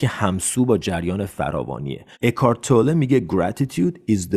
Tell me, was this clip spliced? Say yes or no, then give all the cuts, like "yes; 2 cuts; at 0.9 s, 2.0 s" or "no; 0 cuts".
yes; 1 cut; at 2.1 s